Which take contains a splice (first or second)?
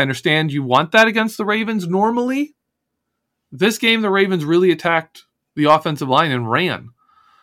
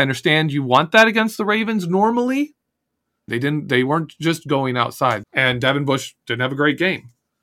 second